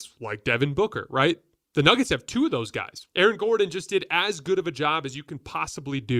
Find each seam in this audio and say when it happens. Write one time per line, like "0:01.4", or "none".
0:03.1